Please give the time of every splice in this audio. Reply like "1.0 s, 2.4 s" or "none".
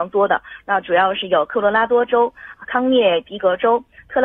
none